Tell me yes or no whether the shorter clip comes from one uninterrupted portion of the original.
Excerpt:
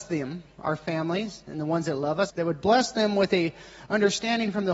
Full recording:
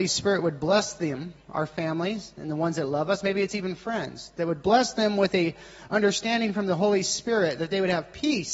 no